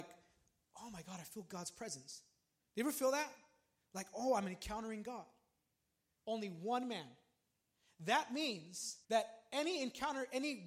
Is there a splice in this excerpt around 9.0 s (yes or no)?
yes